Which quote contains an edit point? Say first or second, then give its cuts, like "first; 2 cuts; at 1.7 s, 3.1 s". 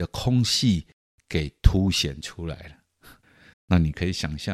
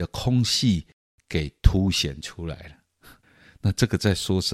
first; 1 cut; at 3.5 s